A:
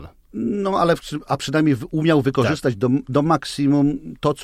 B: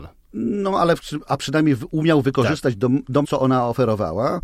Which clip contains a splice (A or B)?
B